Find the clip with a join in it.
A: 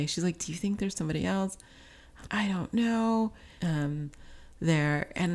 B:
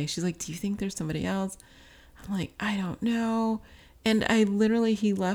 A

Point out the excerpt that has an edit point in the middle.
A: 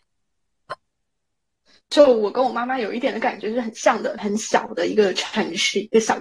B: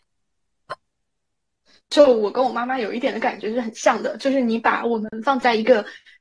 A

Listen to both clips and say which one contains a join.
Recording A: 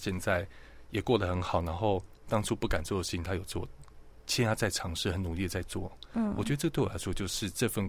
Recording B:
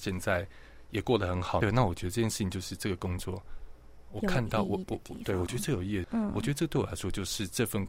B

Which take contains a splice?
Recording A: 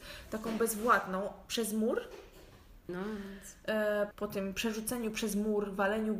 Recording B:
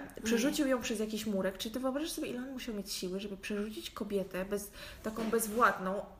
A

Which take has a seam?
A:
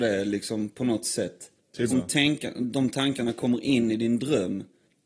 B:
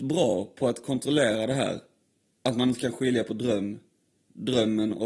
A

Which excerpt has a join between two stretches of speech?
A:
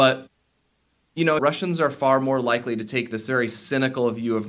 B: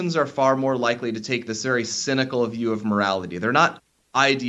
A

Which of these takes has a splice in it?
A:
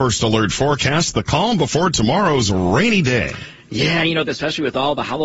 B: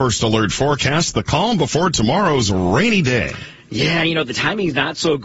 A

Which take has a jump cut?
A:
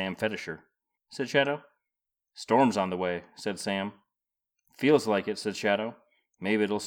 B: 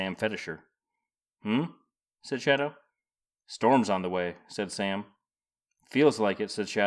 A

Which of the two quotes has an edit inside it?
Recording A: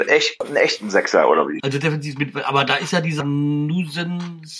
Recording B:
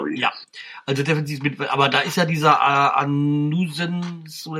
A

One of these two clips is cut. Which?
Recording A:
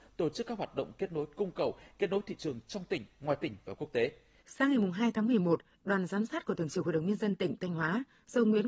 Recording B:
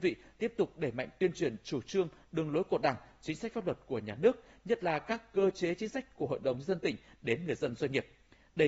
A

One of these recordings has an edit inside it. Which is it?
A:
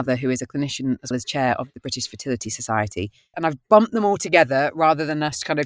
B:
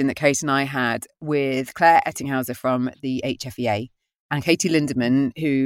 A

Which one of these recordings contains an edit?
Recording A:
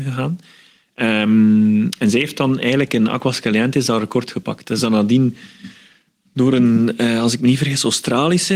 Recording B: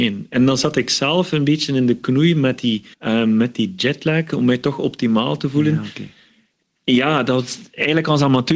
B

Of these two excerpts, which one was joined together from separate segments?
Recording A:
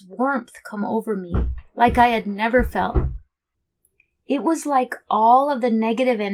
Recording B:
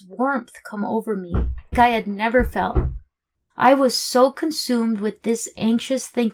B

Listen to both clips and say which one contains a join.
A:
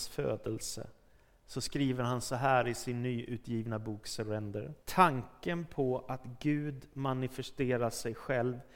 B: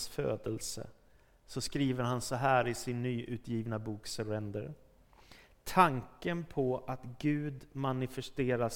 A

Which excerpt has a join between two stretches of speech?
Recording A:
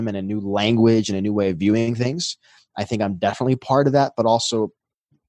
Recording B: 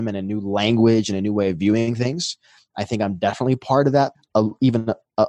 B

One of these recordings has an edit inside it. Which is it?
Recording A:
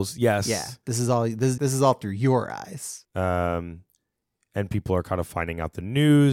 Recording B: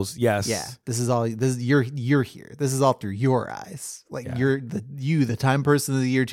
A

